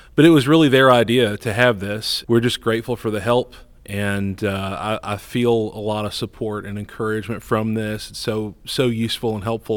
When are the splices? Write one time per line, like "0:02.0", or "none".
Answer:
0:02.2